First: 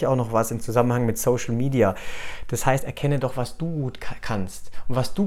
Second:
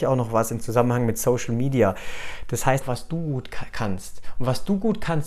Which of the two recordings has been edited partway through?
second; 1 cut; at 2.8 s

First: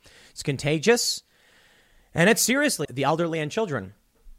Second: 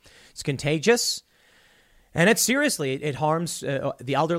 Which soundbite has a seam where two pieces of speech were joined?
first; 1 cut; at 2.8 s

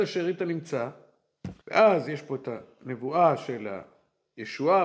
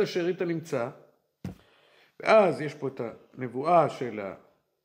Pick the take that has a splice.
first; 1 cut; at 1.6 s

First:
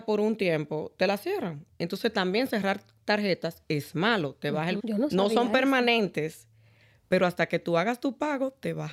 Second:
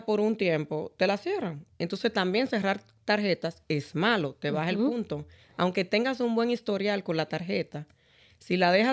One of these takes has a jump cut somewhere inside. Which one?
first; 1 cut; at 4.8 s

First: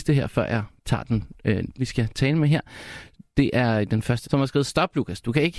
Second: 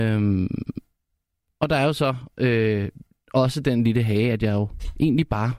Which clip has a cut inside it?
first; 2 cuts; at 1.8 s, 4.2 s

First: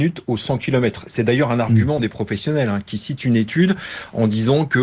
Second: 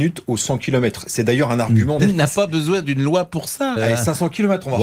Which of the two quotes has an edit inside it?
second; 2 cuts; at 2.0 s, 3.8 s

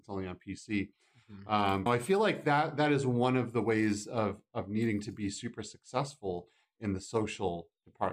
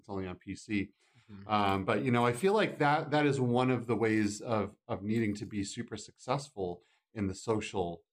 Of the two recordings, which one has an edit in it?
first; 1 cut; at 1.9 s

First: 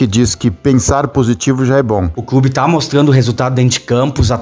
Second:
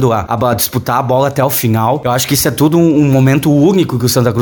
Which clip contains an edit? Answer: first; 1 cut; at 2.1 s

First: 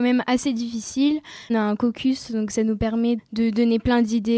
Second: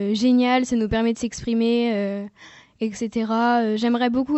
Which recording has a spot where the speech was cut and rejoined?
first; 2 cuts; at 1.5 s, 3.2 s

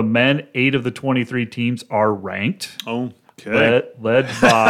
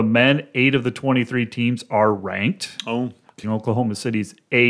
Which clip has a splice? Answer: second; 1 cut; at 3.4 s

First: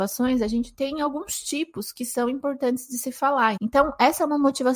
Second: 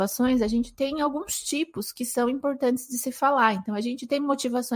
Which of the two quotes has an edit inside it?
first; 1 cut; at 3.6 s

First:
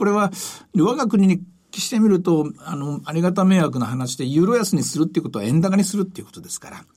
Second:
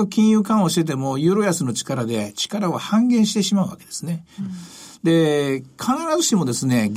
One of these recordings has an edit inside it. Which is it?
second; 1 cut; at 4.4 s

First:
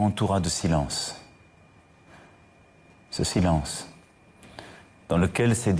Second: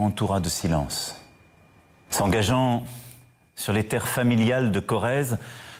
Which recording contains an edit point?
second; 1 cut; at 2.1 s

